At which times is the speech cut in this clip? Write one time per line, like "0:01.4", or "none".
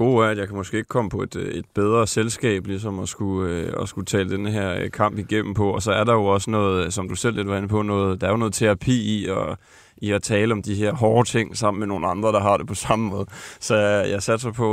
none